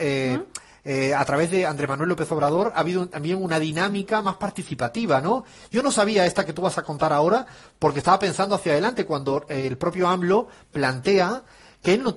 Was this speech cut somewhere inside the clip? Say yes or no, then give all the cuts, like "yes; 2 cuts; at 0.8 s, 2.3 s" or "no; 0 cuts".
no; 0 cuts